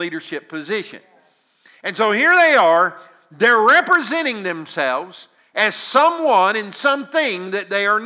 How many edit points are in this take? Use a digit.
0